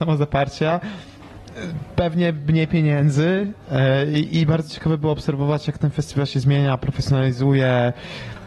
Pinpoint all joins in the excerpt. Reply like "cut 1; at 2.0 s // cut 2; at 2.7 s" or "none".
none

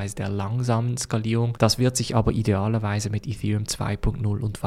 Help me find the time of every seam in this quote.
none

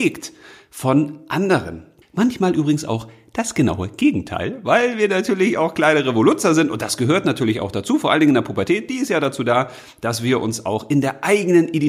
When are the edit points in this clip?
cut 1; at 2.0 s

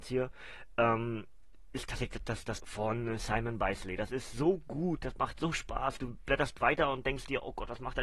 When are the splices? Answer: cut 1; at 2.6 s

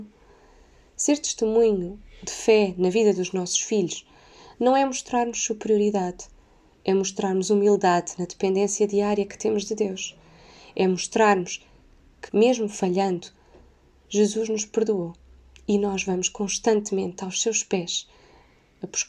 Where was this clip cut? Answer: cut 1; at 12.3 s

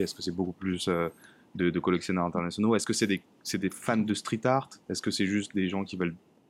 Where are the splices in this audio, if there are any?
none

